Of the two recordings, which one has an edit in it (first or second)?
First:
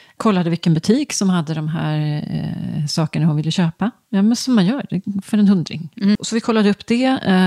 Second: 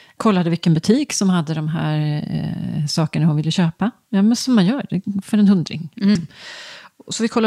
first